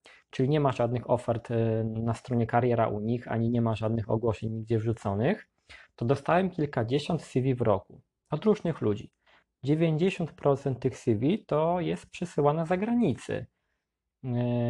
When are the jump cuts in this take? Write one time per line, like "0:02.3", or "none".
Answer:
none